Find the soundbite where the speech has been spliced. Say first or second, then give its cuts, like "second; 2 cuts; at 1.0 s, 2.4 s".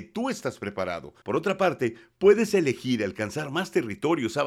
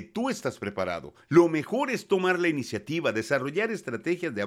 first; 1 cut; at 1.2 s